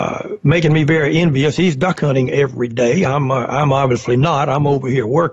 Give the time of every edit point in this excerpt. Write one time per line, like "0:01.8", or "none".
none